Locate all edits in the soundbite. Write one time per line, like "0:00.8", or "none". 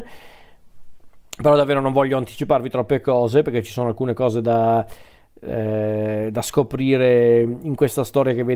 none